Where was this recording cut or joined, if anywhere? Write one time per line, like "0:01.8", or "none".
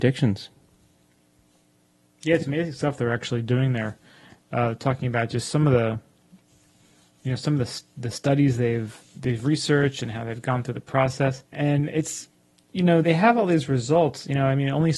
0:11.5
0:13.0